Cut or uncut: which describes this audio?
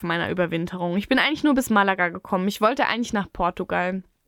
uncut